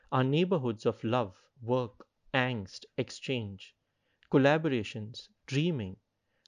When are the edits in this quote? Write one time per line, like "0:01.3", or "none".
0:01.5